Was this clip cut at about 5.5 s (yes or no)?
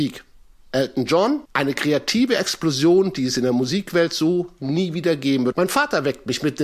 yes